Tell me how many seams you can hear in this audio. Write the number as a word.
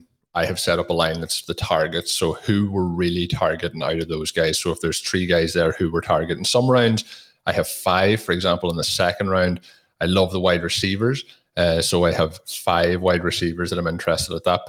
zero